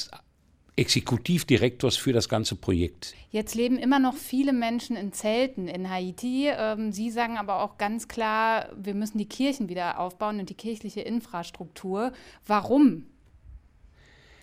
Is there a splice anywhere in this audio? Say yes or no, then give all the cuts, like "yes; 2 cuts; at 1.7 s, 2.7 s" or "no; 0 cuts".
no; 0 cuts